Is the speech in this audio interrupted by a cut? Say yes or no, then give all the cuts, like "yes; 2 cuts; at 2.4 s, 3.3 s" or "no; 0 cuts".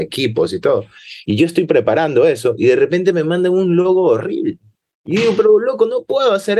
no; 0 cuts